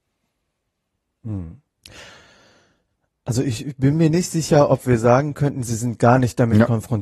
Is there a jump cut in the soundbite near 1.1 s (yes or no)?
no